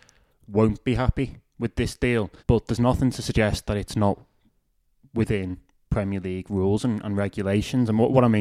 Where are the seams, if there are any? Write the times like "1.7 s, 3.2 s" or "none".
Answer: 2.4 s

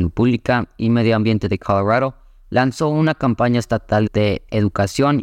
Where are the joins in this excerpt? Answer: 4.1 s

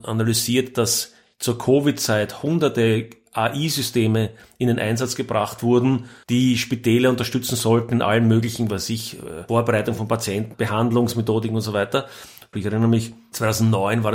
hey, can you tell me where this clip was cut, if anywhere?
12.5 s

